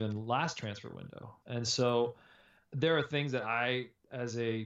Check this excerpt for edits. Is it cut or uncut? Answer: cut